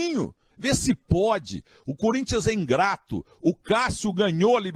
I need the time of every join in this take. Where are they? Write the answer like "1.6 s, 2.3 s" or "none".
none